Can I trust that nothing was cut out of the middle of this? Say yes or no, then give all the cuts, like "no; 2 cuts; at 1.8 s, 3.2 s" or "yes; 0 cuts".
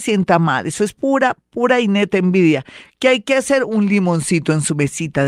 yes; 0 cuts